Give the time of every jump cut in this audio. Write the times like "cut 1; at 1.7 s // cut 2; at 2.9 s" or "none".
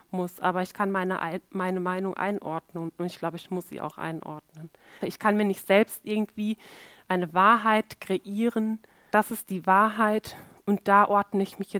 cut 1; at 5.0 s // cut 2; at 9.1 s